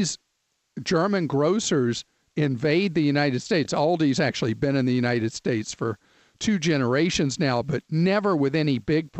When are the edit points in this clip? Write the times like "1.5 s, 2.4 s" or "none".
none